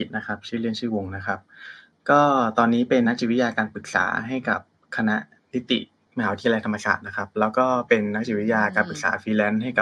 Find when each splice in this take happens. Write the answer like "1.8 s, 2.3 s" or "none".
3.0 s

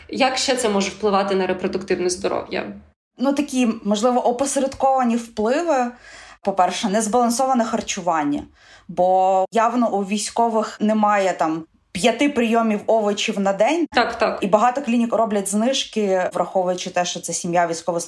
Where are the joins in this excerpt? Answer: 13.9 s, 16.3 s

